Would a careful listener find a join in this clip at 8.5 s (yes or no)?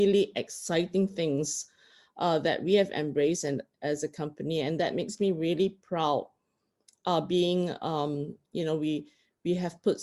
yes